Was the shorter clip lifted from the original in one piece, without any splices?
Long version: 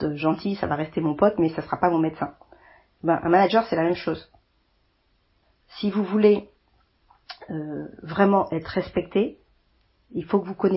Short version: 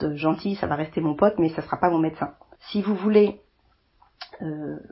no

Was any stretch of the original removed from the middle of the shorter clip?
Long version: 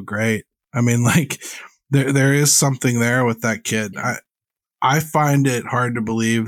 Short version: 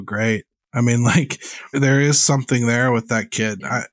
yes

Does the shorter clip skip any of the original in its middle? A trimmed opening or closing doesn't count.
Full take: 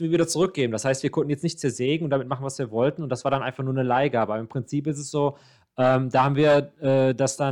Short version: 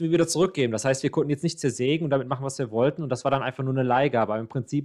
no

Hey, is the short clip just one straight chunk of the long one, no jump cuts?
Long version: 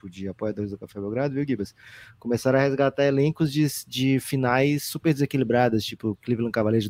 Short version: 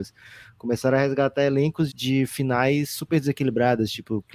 no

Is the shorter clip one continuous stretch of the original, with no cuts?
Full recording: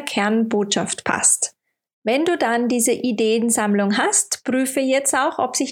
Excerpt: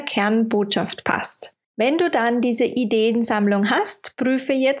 no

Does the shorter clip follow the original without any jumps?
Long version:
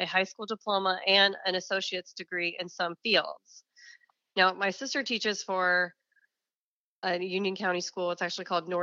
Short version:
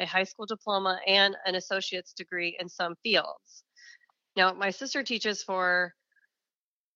yes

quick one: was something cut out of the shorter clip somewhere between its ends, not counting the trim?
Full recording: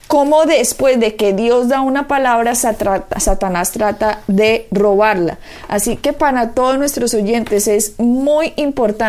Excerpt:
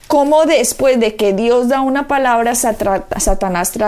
no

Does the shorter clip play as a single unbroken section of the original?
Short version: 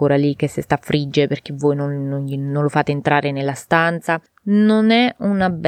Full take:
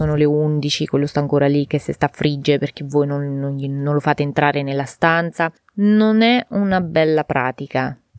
yes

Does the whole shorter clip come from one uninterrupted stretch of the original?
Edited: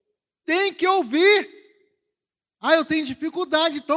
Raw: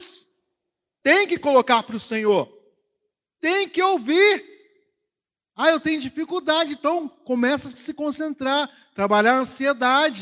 yes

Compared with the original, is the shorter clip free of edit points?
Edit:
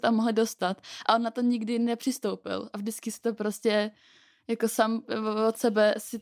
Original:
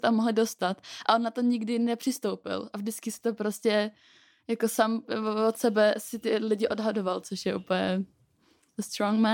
yes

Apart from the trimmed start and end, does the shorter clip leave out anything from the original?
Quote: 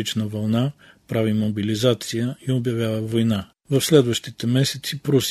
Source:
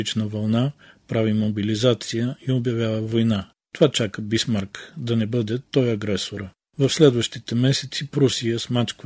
yes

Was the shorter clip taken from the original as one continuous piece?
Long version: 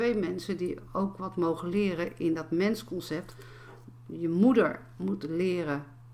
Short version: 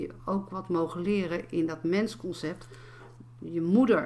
yes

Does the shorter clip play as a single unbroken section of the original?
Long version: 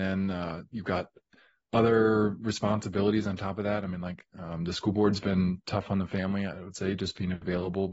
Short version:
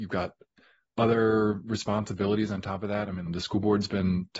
no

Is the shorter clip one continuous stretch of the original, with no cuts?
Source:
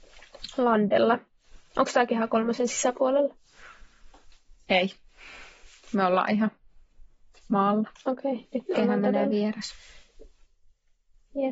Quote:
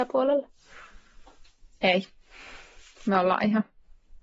yes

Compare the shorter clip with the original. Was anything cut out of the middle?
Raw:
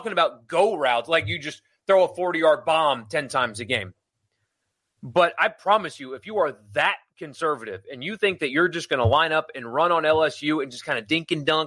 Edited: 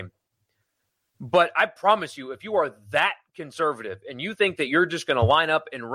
no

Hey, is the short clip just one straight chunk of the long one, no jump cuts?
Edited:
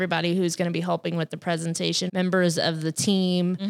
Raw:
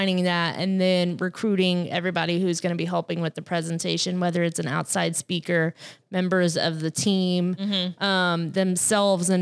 no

